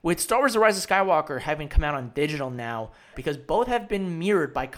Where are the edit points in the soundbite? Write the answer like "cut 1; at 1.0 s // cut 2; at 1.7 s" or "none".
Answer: cut 1; at 3.1 s